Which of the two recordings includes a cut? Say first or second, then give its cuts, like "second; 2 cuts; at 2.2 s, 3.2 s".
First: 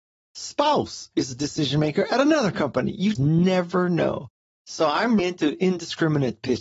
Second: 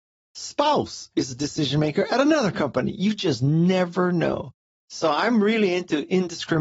first; 2 cuts; at 3.2 s, 5.2 s